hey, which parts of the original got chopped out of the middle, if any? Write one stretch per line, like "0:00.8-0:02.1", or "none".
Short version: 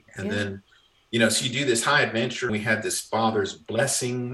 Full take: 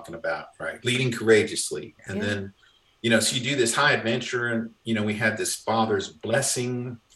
0:04.4-0:05.0